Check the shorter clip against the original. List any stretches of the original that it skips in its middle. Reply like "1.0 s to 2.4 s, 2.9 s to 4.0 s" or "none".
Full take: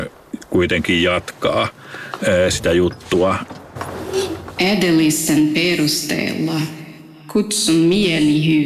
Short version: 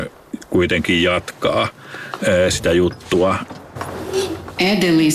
none